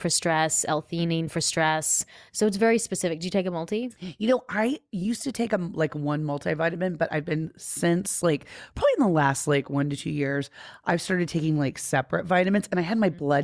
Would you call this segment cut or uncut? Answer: uncut